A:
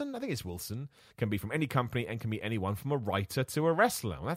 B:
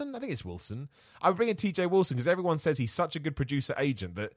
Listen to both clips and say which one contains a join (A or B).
A